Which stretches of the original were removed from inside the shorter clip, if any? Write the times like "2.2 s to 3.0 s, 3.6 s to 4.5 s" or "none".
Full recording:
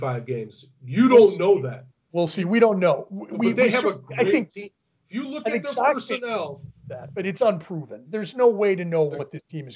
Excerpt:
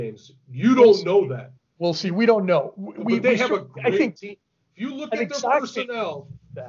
none